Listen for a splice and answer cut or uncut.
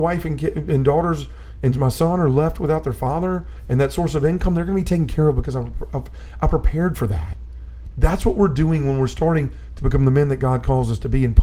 cut